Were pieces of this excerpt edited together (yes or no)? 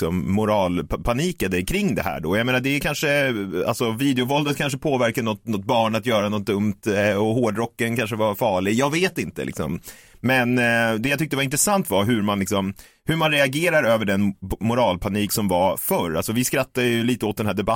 no